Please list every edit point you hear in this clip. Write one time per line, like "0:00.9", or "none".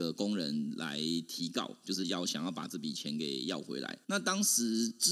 0:04.0